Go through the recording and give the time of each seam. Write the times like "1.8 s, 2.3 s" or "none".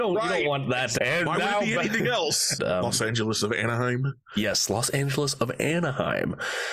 1.0 s, 2.6 s